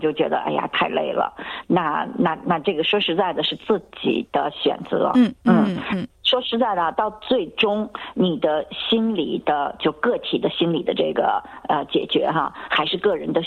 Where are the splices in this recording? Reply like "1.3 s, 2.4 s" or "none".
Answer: 5.4 s